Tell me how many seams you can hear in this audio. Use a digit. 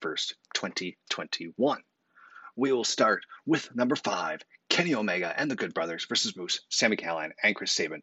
0